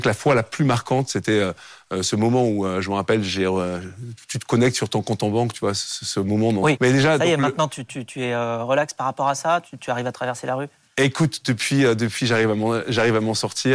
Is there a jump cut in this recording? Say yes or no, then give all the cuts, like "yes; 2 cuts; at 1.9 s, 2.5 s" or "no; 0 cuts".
yes; 1 cut; at 6.8 s